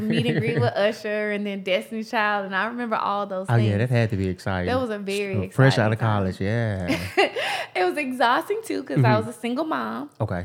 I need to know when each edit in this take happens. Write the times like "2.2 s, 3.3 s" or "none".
none